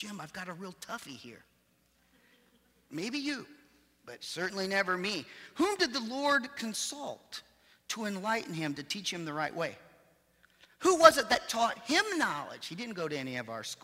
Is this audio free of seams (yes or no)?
yes